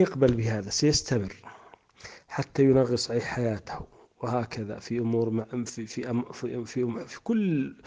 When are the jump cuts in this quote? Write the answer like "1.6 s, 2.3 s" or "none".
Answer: none